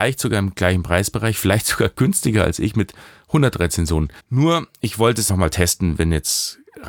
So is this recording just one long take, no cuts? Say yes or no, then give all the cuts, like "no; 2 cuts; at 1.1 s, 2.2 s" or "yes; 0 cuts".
no; 2 cuts; at 4.2 s, 5.3 s